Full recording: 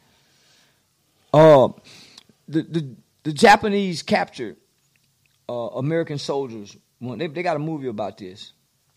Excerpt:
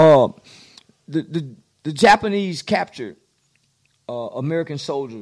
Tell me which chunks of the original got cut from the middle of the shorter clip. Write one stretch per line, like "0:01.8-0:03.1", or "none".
none